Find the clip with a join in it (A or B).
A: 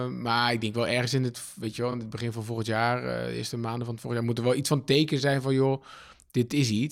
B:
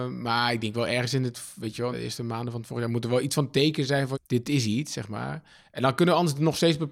B